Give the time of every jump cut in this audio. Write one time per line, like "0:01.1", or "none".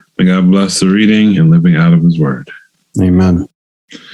0:01.4